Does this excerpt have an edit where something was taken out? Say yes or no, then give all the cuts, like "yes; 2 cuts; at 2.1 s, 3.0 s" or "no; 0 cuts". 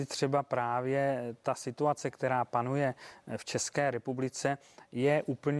no; 0 cuts